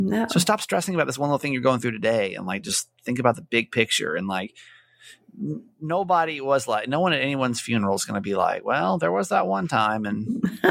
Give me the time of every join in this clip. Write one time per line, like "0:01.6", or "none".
none